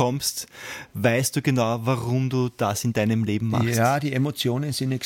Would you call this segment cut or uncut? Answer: uncut